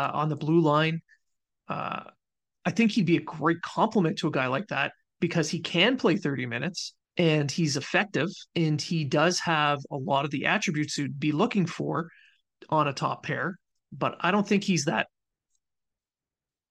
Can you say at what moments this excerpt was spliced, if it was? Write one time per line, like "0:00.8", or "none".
0:01.5
0:07.0
0:08.5